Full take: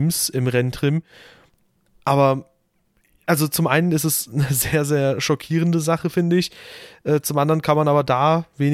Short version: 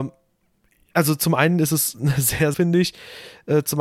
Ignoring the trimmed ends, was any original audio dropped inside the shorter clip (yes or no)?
yes